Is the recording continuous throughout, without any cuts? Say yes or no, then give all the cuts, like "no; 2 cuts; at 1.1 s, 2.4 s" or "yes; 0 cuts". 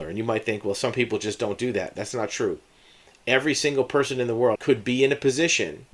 no; 1 cut; at 4.6 s